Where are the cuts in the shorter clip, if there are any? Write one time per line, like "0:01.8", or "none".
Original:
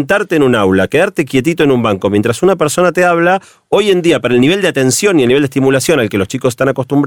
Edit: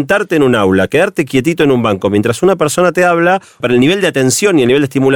0:03.6